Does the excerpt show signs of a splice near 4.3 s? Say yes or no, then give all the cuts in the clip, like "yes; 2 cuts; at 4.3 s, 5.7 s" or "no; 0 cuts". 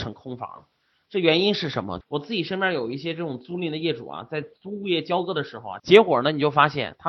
no; 2 cuts; at 2.0 s, 5.8 s